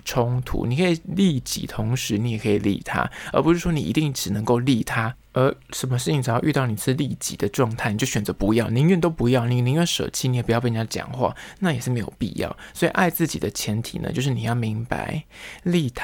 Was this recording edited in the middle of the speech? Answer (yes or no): no